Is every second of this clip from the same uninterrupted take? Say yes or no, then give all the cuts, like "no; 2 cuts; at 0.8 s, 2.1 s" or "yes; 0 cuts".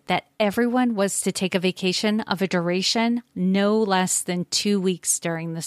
yes; 0 cuts